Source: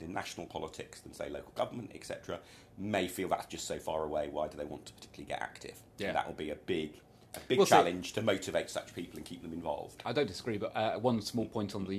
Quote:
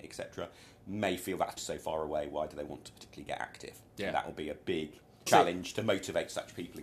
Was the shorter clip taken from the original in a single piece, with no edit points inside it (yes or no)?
no